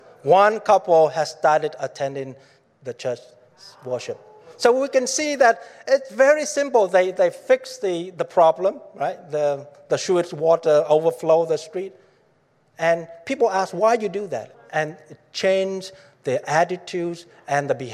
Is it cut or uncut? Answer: cut